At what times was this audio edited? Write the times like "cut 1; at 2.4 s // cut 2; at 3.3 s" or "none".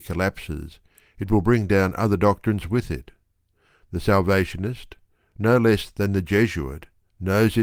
none